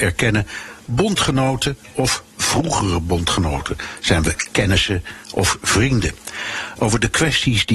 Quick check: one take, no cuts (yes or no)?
no